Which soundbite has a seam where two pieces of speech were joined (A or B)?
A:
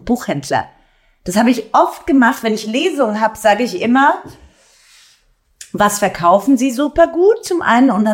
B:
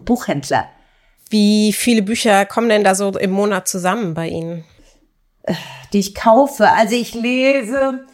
B